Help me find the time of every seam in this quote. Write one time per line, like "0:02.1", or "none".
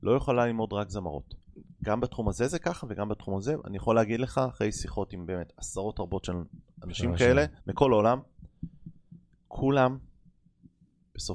0:01.6
0:07.6